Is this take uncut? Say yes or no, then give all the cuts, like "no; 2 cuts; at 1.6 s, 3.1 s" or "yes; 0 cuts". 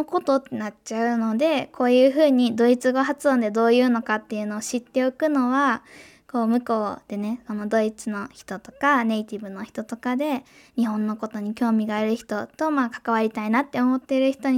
yes; 0 cuts